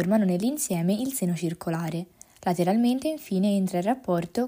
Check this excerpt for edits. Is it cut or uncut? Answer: uncut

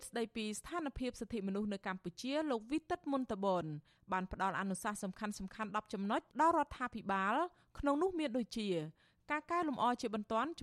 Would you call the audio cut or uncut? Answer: cut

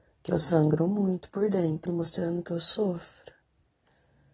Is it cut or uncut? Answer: cut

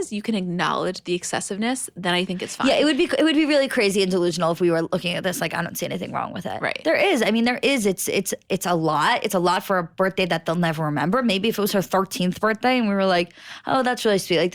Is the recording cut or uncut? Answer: uncut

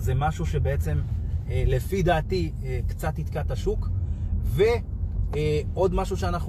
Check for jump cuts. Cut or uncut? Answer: uncut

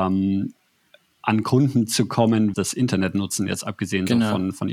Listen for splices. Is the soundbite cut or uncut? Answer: cut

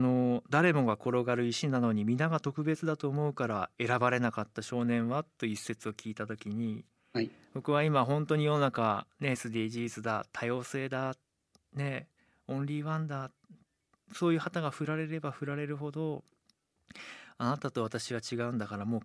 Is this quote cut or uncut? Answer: uncut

